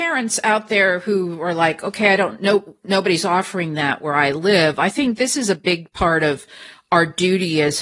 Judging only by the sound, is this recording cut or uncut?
uncut